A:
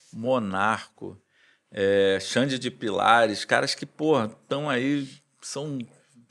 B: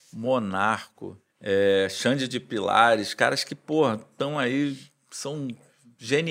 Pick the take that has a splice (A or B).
B